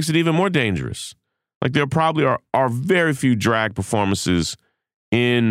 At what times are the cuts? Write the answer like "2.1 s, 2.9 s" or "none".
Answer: none